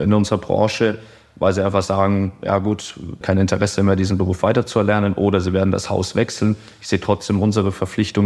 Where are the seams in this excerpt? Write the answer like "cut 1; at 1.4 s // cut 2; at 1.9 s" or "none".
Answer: cut 1; at 3.2 s